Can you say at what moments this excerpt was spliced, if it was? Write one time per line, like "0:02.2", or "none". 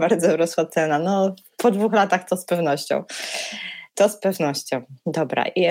none